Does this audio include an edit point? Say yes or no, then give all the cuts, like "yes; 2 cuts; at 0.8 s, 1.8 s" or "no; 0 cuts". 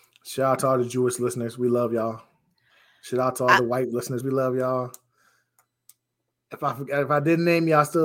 yes; 1 cut; at 4.2 s